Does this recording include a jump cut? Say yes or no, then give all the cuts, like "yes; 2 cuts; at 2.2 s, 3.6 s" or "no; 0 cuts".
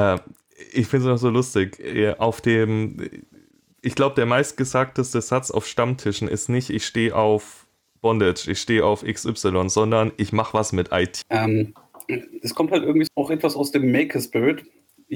yes; 2 cuts; at 11.2 s, 13.1 s